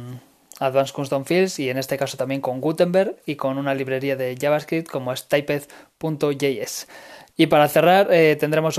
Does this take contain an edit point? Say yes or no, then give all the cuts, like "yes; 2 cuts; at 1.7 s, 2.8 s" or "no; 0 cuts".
no; 0 cuts